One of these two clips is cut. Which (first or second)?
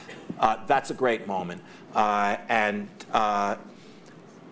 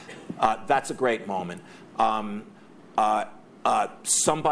first